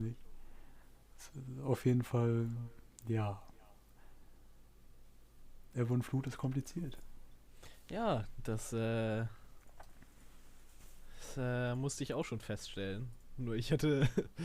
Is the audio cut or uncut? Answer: uncut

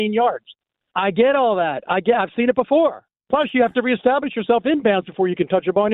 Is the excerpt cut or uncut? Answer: cut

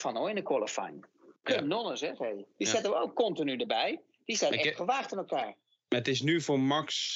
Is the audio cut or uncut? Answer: uncut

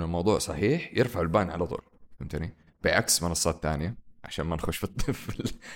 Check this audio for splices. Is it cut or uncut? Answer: uncut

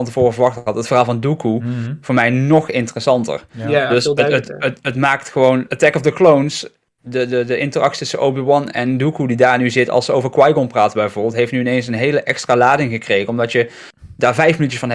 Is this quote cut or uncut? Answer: cut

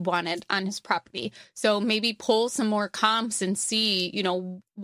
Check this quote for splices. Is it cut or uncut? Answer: uncut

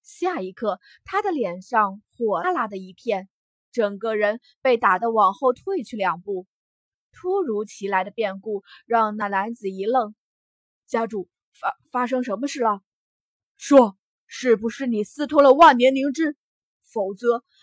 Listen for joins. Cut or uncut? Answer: cut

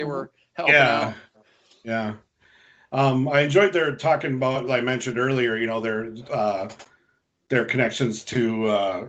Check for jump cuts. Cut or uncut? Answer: cut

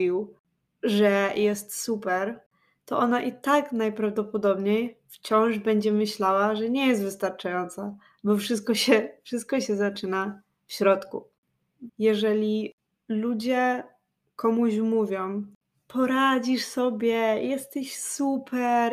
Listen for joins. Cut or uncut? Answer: cut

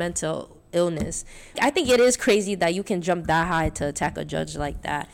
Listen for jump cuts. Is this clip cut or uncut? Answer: cut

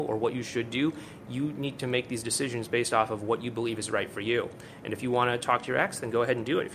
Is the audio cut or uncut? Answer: uncut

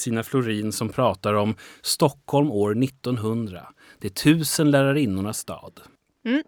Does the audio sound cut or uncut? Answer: uncut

